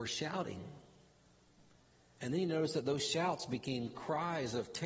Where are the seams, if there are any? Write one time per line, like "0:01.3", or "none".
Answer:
none